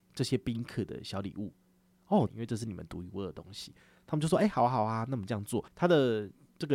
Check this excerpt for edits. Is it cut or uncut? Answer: cut